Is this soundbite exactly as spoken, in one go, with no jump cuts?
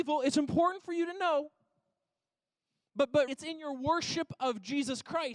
no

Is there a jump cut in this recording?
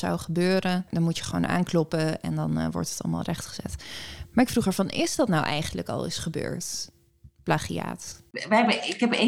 no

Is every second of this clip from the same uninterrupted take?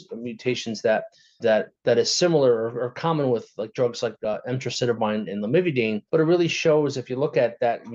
no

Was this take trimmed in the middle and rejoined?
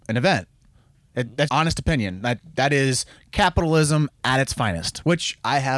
yes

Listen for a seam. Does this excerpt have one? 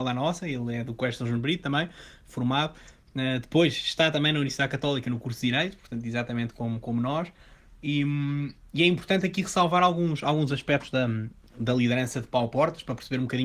no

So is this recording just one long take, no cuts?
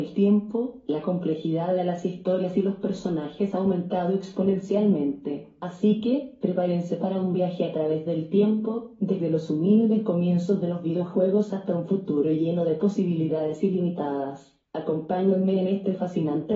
no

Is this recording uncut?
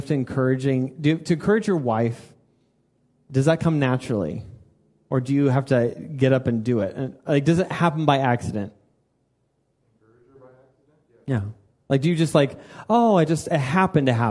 yes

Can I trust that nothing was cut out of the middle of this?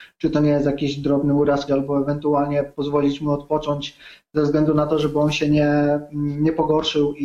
no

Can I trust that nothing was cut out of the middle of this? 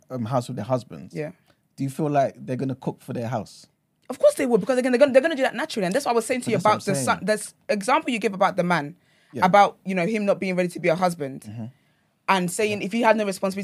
yes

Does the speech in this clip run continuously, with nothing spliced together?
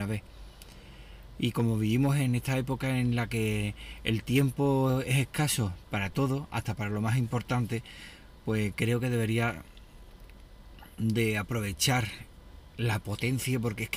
yes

